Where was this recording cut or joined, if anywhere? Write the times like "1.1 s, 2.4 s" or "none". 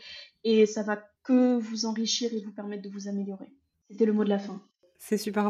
1.2 s